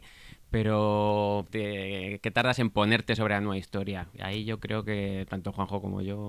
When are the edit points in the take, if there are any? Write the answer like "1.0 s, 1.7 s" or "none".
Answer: 1.5 s